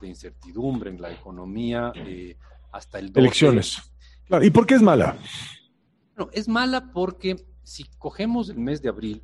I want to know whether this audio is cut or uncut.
cut